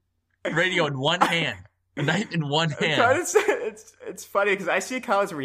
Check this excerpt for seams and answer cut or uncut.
uncut